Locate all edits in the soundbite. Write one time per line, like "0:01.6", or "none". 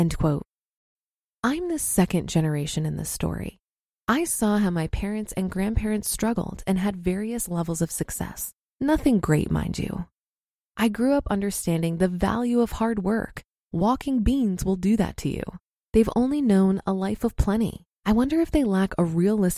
0:15.8
0:18.0

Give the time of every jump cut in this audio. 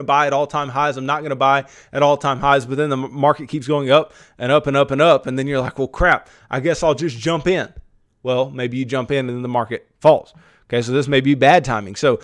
none

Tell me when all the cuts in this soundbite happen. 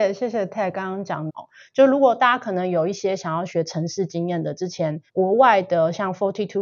0:01.3
0:05.1

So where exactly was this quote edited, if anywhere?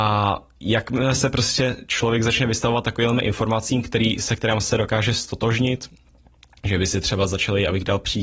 none

